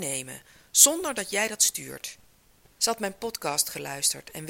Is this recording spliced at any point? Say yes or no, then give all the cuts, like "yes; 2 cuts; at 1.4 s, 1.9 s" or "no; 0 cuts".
yes; 1 cut; at 2.8 s